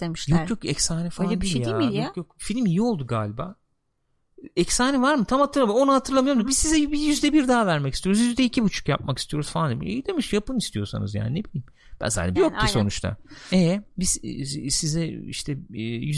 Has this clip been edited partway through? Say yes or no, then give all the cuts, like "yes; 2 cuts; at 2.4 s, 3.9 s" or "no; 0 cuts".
yes; 2 cuts; at 12.4 s, 13.5 s